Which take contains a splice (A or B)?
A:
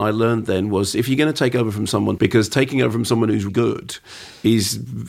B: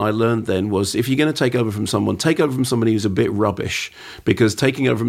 A